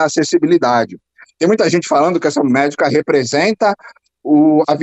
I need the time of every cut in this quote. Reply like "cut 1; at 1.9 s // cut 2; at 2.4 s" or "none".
none